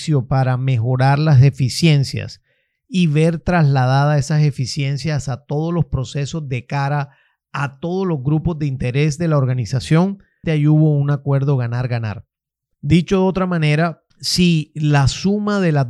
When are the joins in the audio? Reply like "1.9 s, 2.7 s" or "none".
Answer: 10.4 s, 12.7 s, 14.1 s

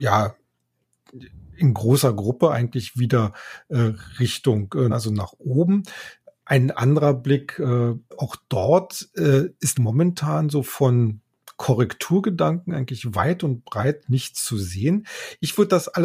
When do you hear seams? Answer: 4.9 s, 8.1 s, 9.7 s

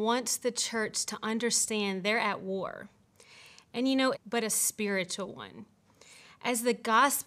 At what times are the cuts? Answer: 4.1 s

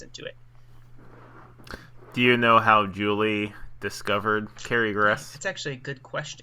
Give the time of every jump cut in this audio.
none

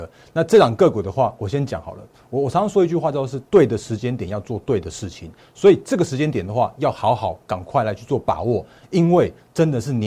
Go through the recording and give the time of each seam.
none

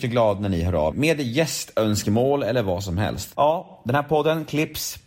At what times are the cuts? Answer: 0.9 s, 3.3 s

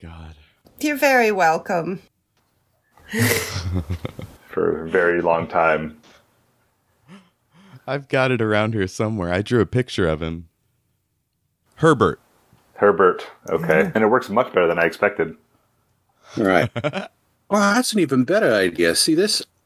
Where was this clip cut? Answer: 2.9 s, 13.9 s, 17.3 s

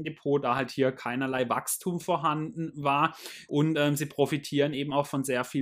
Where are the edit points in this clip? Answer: 3.5 s

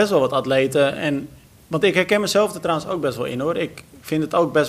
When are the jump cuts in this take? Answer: none

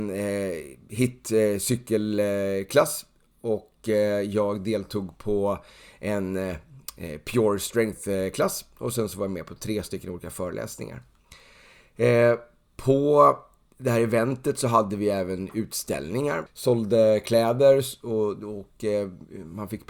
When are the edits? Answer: 16.5 s

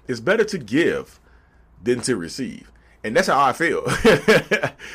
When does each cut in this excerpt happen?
none

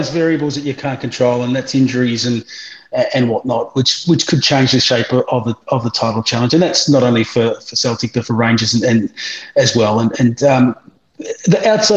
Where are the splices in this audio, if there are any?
none

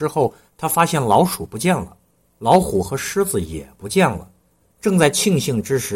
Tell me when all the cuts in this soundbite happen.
4.6 s

